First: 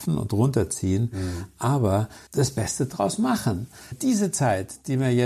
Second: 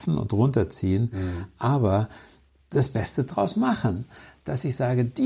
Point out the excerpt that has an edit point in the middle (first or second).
first